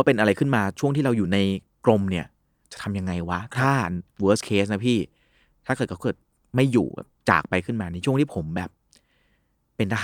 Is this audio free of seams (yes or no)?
yes